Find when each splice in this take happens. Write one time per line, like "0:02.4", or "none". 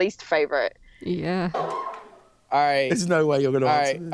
0:01.5